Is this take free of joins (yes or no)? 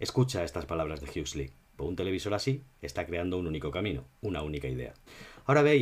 no